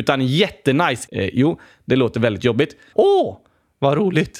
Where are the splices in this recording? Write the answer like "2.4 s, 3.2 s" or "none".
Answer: 1.1 s, 2.9 s